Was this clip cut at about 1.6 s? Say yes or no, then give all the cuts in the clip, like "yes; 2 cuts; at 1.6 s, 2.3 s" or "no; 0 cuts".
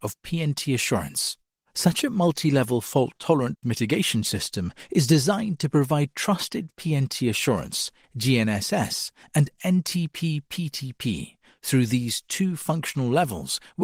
no; 1 cut; at 8.0 s